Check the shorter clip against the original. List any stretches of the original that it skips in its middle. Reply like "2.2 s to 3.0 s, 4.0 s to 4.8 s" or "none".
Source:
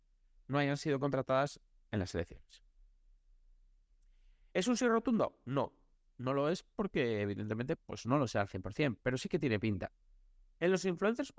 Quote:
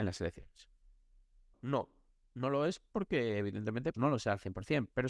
3.5 s to 5.4 s, 7.8 s to 8.0 s